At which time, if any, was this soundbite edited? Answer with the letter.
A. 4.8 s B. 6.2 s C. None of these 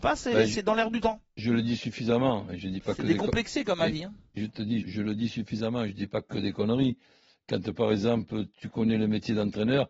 A